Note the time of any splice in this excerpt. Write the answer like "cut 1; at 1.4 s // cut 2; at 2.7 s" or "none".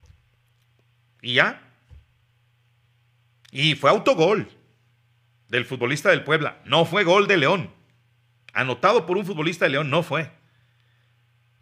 none